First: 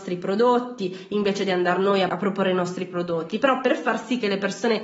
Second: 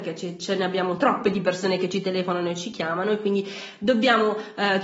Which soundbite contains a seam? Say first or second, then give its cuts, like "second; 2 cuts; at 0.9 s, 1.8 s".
first; 1 cut; at 2.1 s